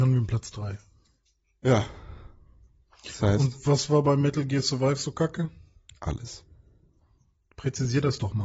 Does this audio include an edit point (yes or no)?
no